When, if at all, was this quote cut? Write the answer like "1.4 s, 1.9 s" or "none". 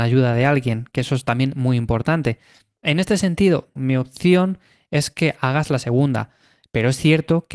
3.8 s